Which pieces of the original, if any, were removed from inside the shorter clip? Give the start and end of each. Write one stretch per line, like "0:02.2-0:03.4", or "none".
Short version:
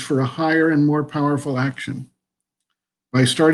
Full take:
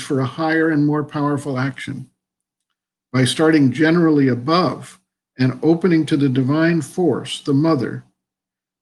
none

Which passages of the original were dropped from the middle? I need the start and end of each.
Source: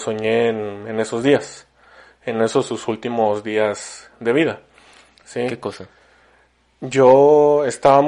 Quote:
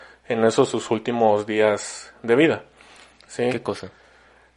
none

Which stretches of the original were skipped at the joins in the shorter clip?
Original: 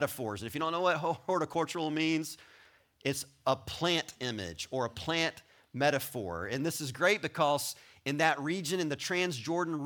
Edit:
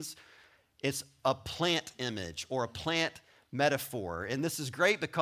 none

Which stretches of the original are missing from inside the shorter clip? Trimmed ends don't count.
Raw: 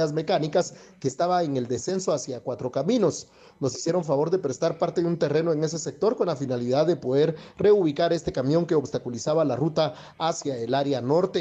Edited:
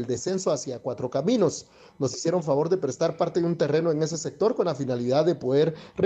none

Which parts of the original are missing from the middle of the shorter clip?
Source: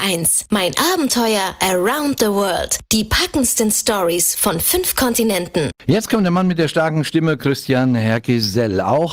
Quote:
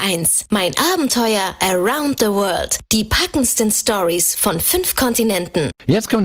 none

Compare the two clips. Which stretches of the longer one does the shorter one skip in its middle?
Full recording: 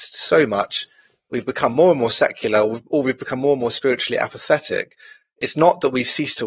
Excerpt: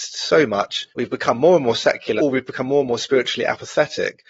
0:00.9-0:01.3
0:02.5-0:02.9

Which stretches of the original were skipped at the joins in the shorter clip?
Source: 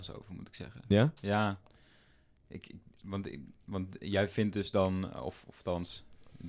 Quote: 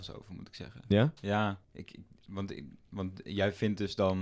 0:01.6-0:02.4

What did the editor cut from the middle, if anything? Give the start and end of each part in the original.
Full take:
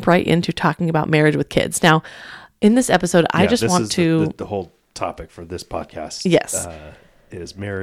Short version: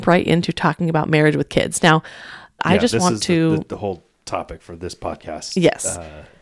0:02.6-0:03.3

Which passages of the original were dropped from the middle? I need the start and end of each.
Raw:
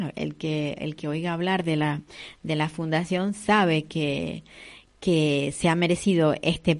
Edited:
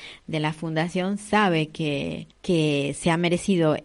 0:04.5-0:04.9

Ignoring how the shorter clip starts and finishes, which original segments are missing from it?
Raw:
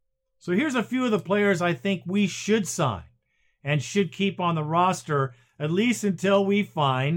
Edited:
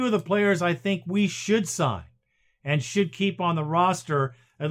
none

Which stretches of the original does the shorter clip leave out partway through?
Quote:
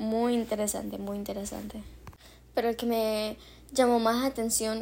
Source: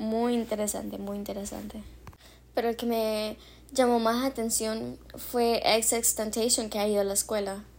none

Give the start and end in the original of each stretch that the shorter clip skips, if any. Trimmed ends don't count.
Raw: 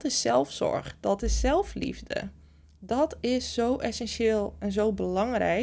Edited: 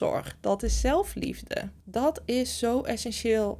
0:02.4-0:02.8

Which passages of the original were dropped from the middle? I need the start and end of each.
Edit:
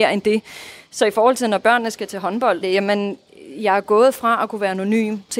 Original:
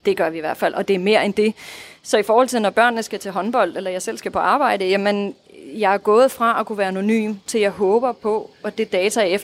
0:03.7-0:04.8

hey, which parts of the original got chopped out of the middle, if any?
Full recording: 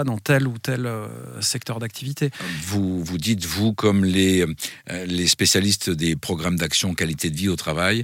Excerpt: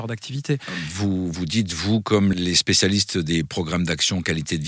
0:04.1-0:05.1

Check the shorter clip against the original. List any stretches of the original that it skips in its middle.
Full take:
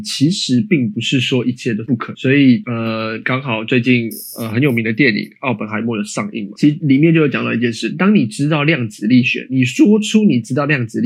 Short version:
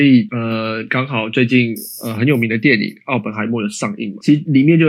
none

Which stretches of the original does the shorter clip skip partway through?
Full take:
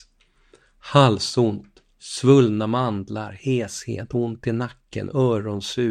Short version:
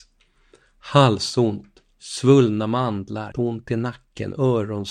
0:03.3-0:04.1

